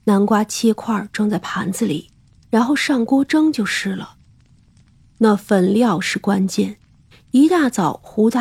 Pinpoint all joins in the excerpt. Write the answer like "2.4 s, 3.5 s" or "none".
2.4 s